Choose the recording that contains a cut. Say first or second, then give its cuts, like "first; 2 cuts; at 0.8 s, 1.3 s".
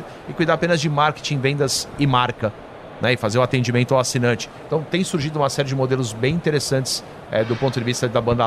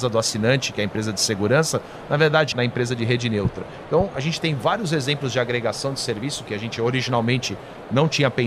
second; 1 cut; at 2.5 s